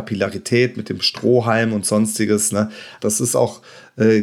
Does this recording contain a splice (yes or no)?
yes